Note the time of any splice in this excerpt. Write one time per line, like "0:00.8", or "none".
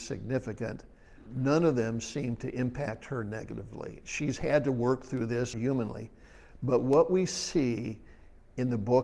0:01.3
0:05.5